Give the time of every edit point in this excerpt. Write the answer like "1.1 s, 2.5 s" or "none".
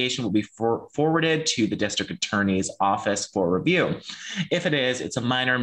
none